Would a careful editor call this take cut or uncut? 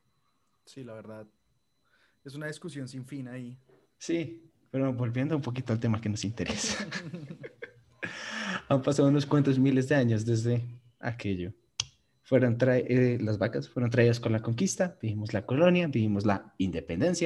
uncut